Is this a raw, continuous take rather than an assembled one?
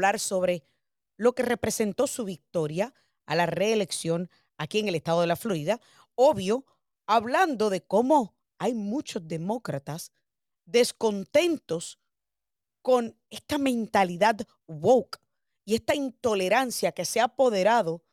yes; 0 cuts

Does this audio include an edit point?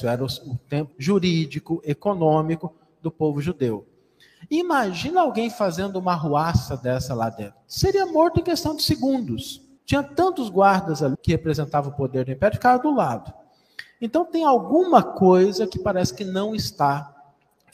yes; 3 cuts; at 0.9 s, 9.8 s, 11.1 s

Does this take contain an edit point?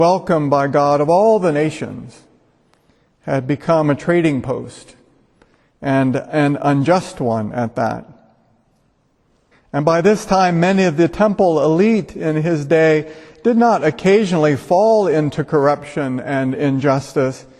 yes; 1 cut; at 9.5 s

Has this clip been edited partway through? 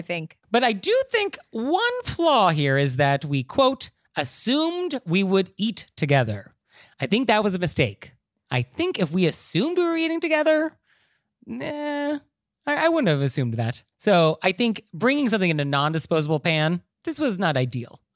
no; 0 cuts

